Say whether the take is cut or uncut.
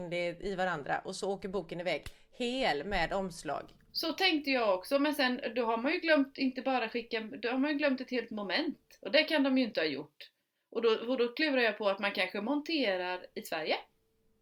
uncut